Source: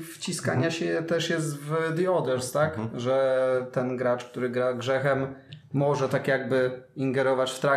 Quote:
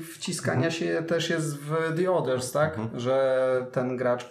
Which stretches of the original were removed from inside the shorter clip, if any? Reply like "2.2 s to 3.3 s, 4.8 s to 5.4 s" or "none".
none